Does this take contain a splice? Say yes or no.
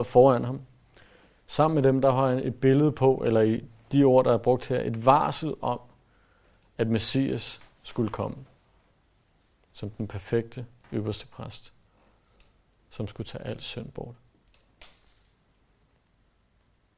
no